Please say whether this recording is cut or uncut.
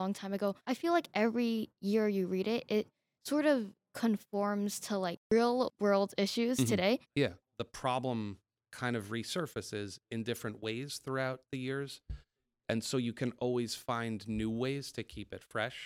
uncut